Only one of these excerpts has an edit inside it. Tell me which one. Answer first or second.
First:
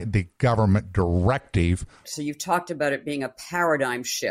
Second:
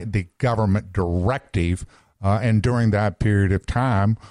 first